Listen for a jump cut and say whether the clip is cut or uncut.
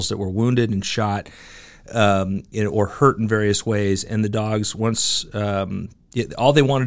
uncut